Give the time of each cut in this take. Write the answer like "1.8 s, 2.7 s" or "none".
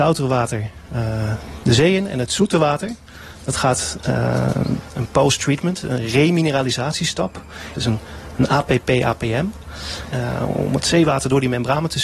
4.9 s, 7.7 s, 10.1 s